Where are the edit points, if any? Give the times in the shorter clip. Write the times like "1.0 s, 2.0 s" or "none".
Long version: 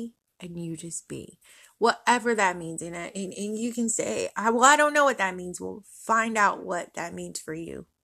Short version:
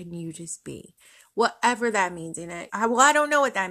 2.7 s